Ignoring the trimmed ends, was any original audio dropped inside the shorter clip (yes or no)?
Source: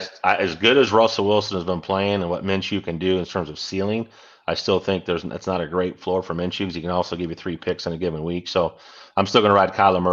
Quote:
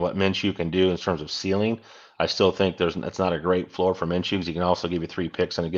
no